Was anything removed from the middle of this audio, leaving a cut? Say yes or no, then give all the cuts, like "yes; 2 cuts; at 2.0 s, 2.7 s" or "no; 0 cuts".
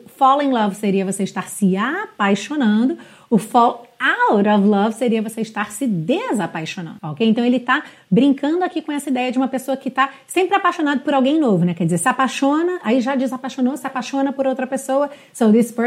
yes; 1 cut; at 7.0 s